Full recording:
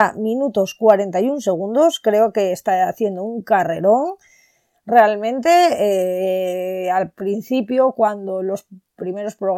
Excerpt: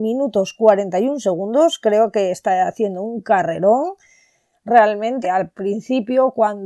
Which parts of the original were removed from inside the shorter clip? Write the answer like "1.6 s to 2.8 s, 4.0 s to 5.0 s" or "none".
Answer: 5.4 s to 6.8 s